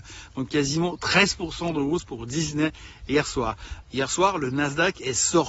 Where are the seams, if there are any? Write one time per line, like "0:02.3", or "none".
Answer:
0:03.8